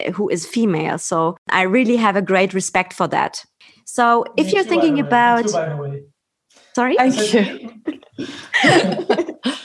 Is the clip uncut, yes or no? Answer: no